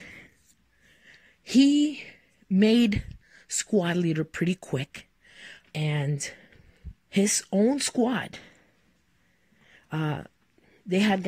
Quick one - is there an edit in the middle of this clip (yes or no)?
yes